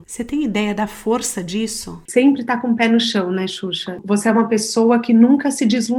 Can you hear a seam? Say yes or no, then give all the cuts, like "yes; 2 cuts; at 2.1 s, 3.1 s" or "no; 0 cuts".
yes; 1 cut; at 2.1 s